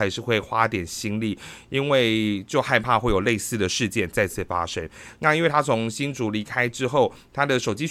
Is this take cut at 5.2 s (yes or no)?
yes